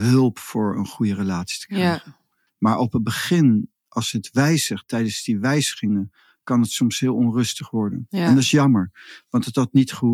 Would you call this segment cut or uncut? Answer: uncut